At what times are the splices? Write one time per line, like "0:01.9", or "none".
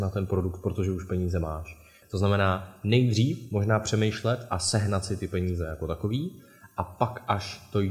0:02.0